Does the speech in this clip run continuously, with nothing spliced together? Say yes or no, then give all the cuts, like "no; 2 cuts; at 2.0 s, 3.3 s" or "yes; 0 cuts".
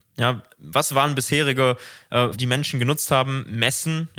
no; 1 cut; at 2.3 s